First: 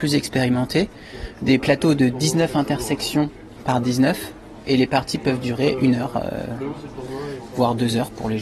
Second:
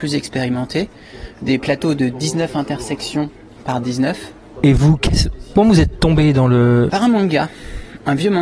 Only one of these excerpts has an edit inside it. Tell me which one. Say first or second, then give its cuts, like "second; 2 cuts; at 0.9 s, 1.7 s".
second; 2 cuts; at 4.6 s, 6.9 s